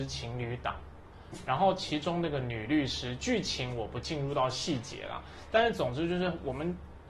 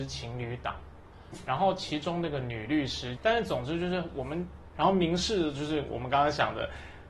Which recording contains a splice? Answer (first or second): second